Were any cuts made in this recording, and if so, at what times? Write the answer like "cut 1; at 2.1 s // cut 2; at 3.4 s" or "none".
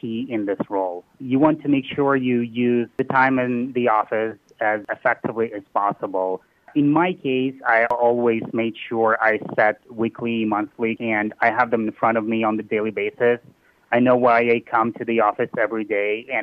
cut 1; at 11.0 s